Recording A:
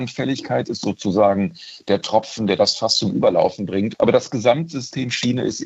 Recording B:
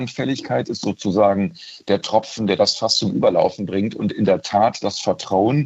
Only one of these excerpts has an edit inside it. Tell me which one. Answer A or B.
A